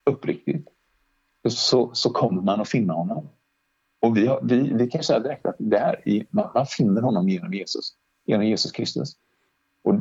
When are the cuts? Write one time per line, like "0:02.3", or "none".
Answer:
none